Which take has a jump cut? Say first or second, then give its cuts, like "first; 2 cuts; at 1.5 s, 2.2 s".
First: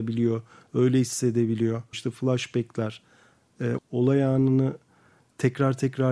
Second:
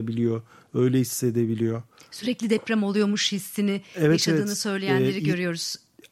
first; 2 cuts; at 1.9 s, 3.8 s